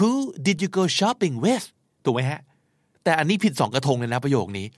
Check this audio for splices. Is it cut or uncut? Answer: uncut